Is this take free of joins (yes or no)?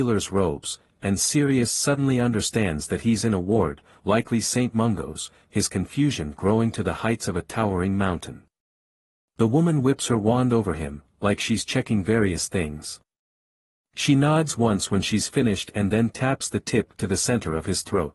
yes